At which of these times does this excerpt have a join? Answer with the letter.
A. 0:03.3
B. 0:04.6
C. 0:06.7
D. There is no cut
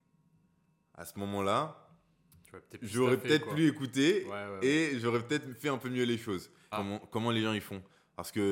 C